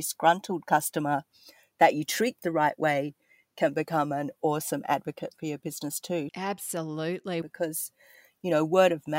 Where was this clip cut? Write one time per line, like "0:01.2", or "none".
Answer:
0:06.3
0:07.4